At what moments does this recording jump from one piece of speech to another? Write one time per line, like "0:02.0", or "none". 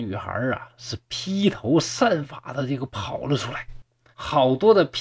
0:04.1